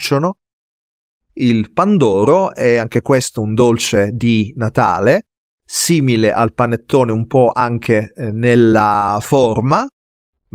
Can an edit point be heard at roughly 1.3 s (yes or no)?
yes